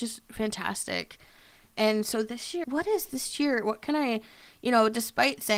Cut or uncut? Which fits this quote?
cut